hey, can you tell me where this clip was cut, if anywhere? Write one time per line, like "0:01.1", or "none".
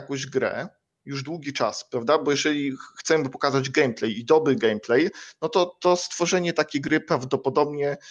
none